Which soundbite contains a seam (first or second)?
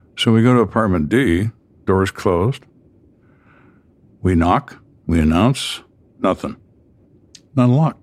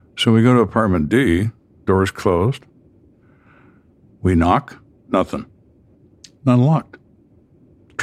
second